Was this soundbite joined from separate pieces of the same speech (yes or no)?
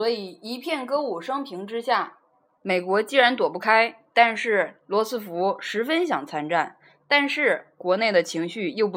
yes